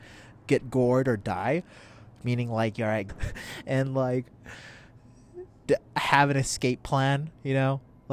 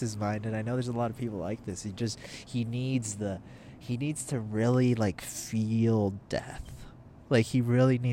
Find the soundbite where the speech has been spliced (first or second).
first